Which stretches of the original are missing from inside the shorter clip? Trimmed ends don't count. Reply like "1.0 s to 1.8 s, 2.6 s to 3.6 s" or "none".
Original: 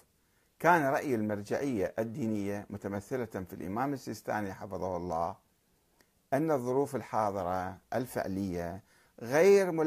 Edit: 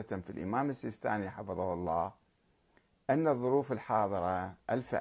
none